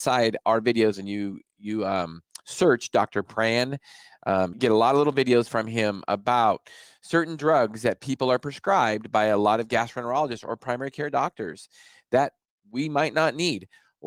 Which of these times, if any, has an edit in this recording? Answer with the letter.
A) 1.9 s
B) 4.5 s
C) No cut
B